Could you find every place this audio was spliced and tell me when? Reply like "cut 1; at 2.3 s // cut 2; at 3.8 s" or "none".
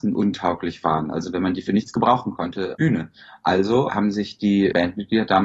cut 1; at 2.7 s

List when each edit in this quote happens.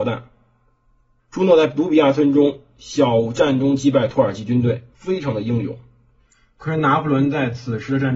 cut 1; at 1.2 s // cut 2; at 4.9 s

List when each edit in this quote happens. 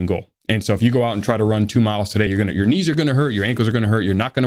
none

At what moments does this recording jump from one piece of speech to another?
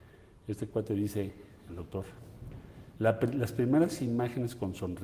none

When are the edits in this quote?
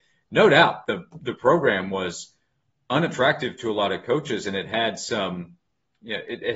none

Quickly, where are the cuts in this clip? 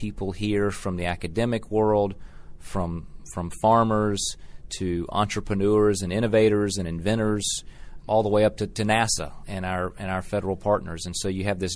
cut 1; at 8.0 s

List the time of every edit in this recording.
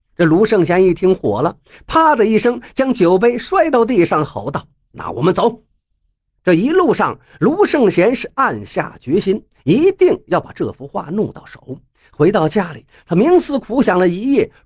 none

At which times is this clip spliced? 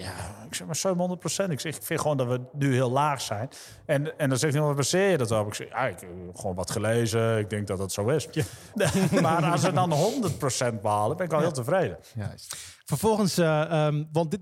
cut 1; at 8.7 s

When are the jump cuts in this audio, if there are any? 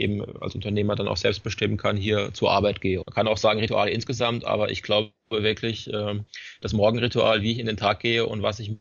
cut 1; at 3.0 s

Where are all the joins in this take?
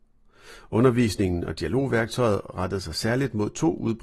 none

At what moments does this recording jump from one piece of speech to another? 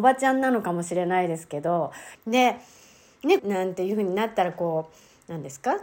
cut 1; at 2.1 s // cut 2; at 3.4 s

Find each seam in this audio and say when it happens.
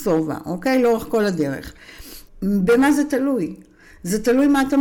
cut 1; at 2.3 s

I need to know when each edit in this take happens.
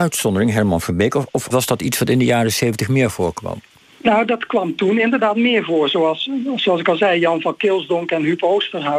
cut 1; at 1.5 s

